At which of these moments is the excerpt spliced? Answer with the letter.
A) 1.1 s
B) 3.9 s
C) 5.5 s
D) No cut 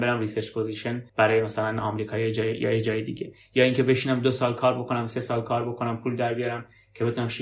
A